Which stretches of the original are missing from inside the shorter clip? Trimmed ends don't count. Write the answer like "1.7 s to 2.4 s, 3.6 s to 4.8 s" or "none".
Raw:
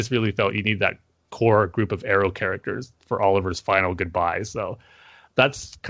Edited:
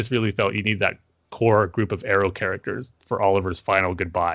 none